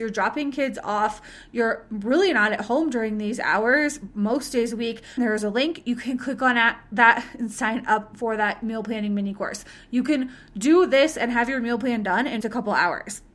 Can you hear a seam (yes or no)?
yes